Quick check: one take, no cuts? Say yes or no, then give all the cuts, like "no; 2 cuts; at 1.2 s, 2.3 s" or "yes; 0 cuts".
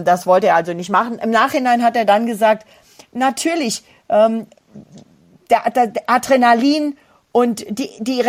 yes; 0 cuts